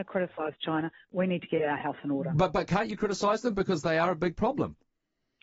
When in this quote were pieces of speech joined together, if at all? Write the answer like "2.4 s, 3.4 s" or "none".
none